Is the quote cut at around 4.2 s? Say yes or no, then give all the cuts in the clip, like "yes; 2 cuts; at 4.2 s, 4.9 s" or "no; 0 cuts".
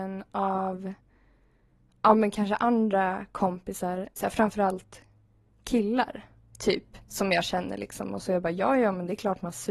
yes; 2 cuts; at 4.2 s, 7.0 s